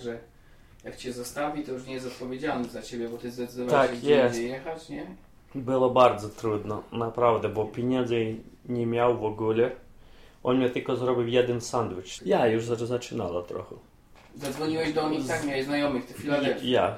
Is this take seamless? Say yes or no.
no